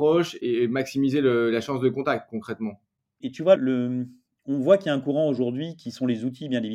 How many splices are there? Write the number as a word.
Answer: one